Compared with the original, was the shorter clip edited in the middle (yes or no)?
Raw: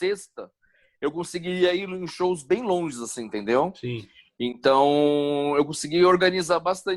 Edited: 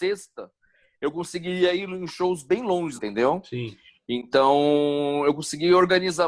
yes